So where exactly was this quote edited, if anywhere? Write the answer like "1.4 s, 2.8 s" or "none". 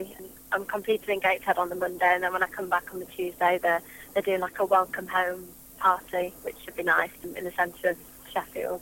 none